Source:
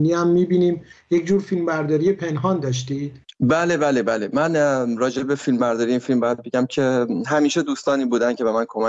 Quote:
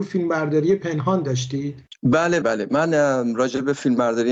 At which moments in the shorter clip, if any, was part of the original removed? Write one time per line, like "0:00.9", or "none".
0:02.4